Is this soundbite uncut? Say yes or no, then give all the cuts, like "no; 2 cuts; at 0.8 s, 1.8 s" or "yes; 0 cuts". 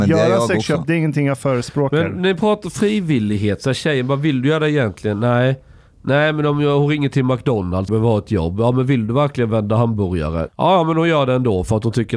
no; 2 cuts; at 7.9 s, 10.5 s